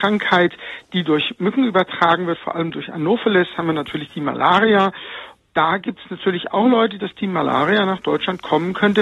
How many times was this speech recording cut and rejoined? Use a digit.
1